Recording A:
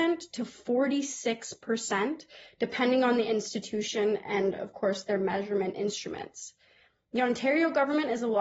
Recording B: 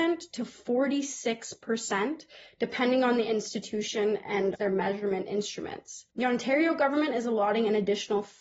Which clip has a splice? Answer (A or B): B